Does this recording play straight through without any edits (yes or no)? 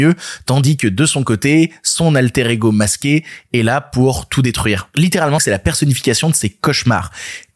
no